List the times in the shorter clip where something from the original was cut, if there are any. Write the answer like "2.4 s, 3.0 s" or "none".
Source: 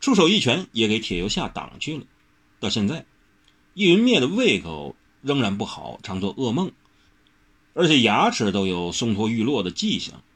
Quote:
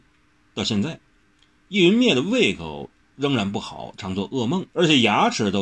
4.7 s